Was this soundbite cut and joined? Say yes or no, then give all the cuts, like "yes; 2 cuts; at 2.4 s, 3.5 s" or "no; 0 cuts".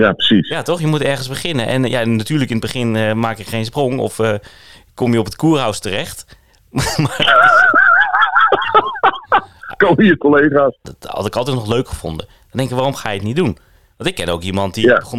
yes; 1 cut; at 10.8 s